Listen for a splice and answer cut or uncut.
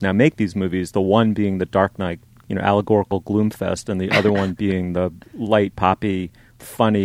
cut